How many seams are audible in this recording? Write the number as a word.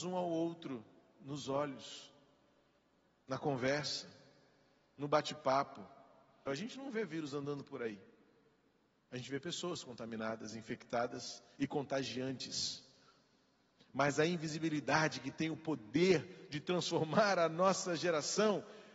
one